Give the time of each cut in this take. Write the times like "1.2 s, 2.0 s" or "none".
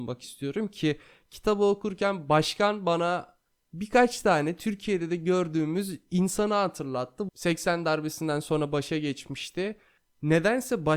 7.3 s